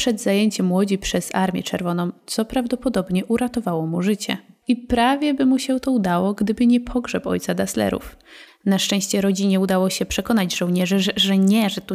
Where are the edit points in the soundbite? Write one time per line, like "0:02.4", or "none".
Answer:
0:04.6
0:08.5